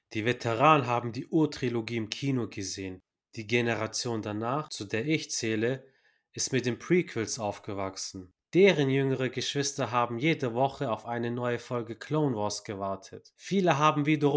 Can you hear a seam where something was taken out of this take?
no; 0 cuts

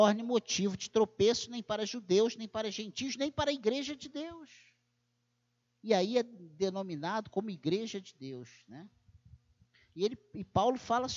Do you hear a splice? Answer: yes; 1 cut; at 5.6 s

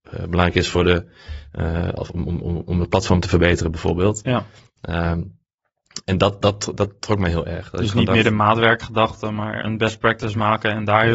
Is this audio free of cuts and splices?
yes; 0 cuts

